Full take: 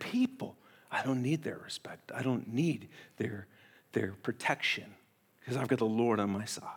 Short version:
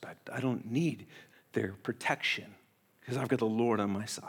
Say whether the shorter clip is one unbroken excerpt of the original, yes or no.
no